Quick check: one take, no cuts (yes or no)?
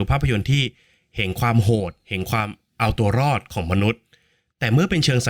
yes